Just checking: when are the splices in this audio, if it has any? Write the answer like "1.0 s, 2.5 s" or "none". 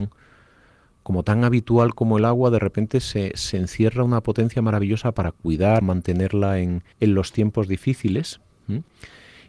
5.8 s, 6.9 s